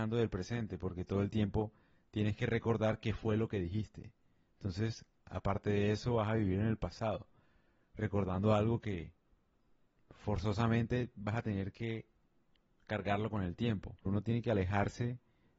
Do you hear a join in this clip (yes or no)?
yes